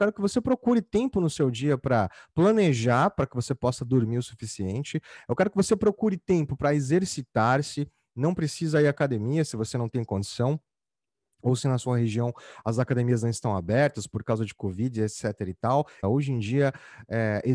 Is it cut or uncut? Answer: cut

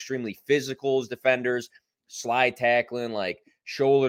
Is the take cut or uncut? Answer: uncut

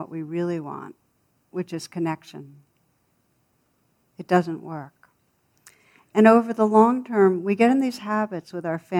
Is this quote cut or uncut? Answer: uncut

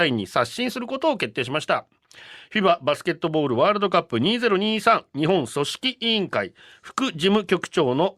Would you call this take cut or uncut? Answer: uncut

